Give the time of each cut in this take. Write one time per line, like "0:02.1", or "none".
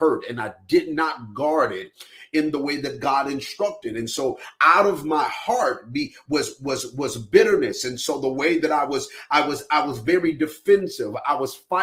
none

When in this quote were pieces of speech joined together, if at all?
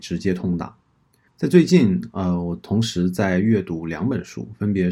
0:01.3

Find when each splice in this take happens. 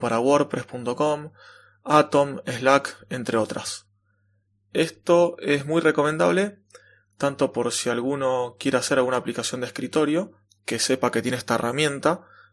none

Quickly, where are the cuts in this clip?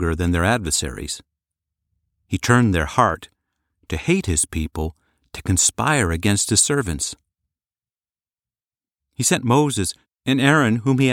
0:10.1

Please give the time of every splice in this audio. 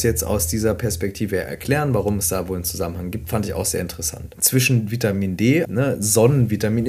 0:04.3
0:05.6

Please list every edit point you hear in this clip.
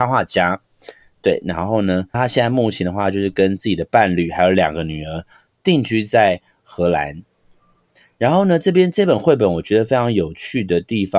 0:02.1

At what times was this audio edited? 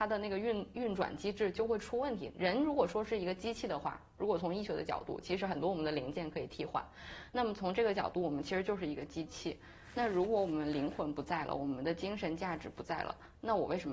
none

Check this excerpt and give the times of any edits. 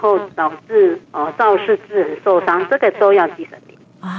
0:01.0

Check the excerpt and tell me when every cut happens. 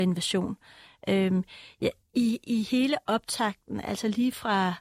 none

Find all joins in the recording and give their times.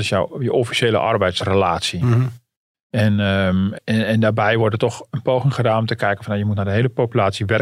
0:03.7

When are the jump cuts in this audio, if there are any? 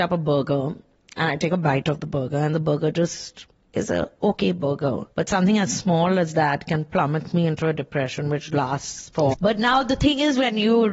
0:05.1
0:09.3

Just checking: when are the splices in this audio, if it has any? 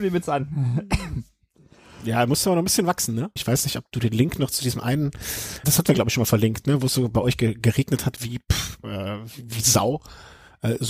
0:03.4
0:05.6

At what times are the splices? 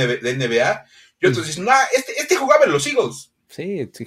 none

